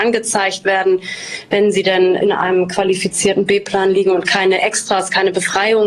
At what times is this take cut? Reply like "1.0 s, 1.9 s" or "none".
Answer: none